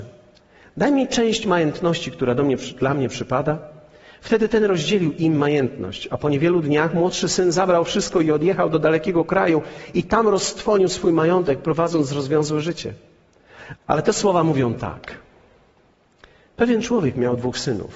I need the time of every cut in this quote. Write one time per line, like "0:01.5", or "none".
0:13.8